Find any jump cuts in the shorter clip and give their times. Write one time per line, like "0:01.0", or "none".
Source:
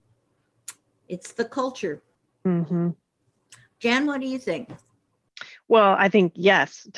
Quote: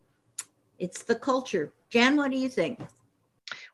0:01.8